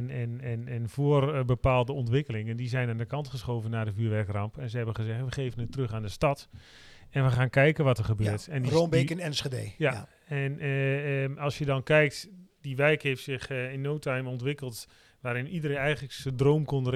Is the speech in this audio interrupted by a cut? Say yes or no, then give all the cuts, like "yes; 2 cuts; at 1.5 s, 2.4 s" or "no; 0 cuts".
no; 0 cuts